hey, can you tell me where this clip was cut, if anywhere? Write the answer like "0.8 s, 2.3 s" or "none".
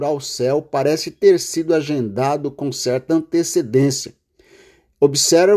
none